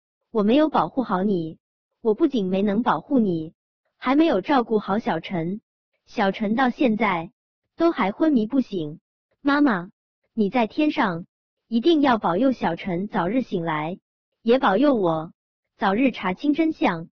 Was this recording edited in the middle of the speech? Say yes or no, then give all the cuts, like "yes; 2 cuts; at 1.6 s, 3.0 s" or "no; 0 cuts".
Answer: no; 0 cuts